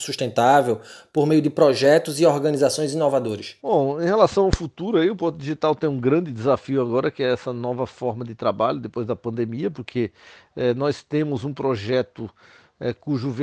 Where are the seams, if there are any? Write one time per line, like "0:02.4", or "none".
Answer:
0:03.6

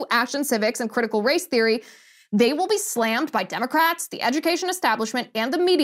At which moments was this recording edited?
none

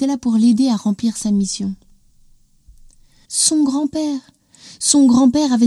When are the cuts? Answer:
0:03.2

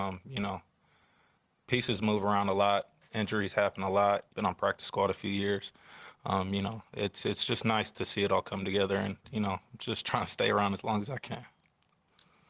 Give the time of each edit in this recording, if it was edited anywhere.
0:04.3

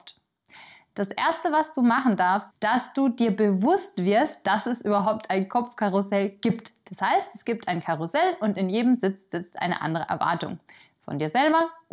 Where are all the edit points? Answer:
0:02.5

